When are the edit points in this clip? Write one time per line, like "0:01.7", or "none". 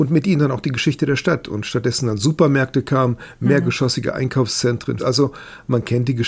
0:05.0